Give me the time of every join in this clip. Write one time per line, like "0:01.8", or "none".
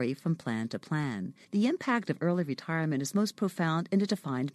0:01.4